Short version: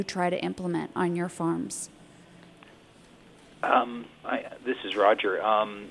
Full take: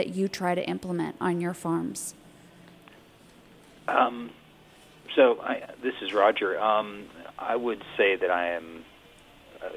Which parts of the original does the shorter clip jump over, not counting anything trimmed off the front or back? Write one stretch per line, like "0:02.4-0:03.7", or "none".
0:04.5-0:05.4